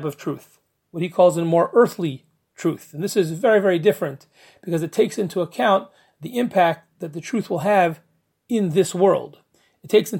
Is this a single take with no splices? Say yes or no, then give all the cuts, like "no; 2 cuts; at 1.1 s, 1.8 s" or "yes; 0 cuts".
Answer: yes; 0 cuts